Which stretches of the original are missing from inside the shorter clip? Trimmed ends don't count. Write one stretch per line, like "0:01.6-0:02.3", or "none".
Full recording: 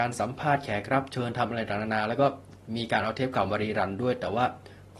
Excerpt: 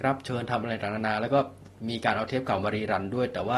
none

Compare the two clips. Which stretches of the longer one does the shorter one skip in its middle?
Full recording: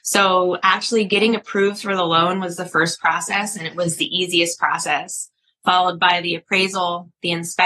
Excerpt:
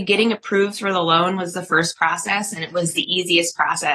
none

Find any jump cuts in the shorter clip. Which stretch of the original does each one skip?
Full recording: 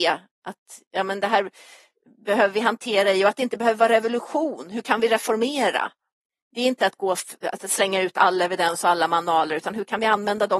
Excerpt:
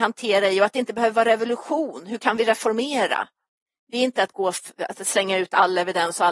none

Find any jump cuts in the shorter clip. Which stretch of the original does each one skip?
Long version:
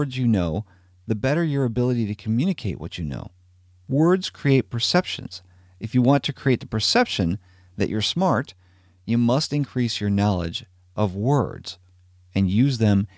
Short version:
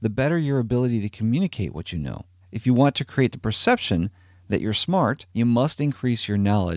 0:03.5-0:05.7
0:08.6-0:09.0

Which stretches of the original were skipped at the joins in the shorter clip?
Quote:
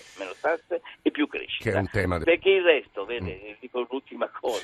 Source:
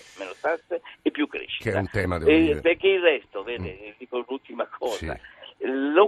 0:02.2-0:02.6

